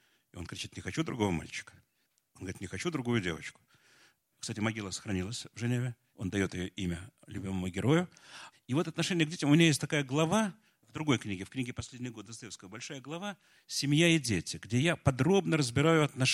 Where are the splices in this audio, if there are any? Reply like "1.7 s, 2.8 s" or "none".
4.3 s, 6.1 s, 8.5 s

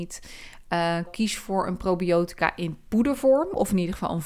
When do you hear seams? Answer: 1.1 s

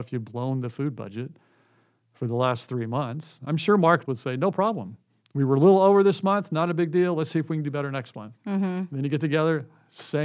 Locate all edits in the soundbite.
4.1 s

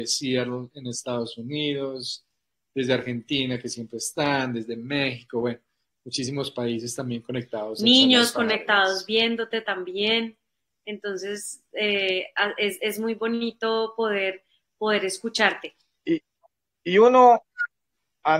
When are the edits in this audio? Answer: 16.0 s

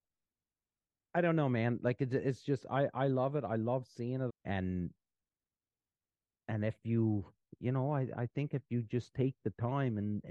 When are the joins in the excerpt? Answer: 4.3 s

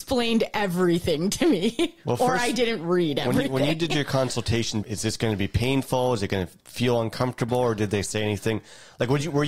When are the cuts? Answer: 4.8 s

